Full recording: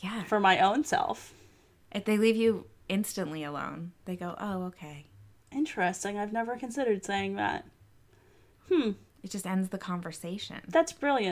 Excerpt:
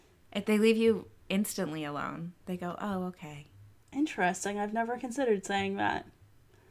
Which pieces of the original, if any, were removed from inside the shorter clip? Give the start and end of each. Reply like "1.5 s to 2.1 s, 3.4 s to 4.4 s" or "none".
none